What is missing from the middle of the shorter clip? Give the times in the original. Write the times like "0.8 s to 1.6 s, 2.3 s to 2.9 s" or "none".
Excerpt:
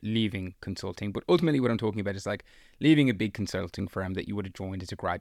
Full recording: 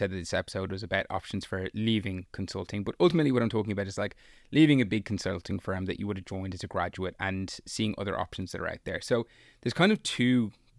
none